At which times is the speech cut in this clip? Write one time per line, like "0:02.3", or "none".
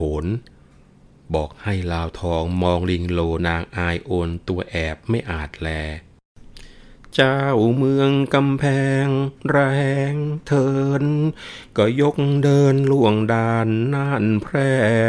0:03.4